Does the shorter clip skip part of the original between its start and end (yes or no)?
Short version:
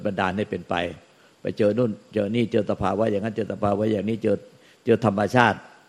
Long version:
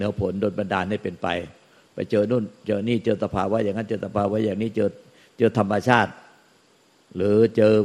no